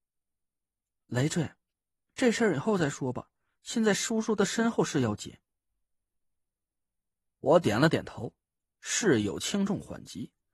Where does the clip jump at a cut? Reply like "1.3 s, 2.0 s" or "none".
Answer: none